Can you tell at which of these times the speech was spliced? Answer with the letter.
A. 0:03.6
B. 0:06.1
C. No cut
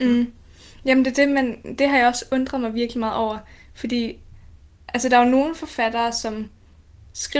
C